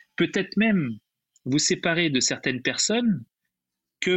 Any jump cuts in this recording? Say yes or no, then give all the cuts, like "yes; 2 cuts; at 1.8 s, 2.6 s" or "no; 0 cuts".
no; 0 cuts